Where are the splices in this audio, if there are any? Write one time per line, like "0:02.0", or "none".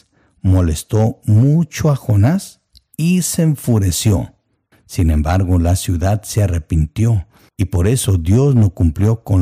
0:04.7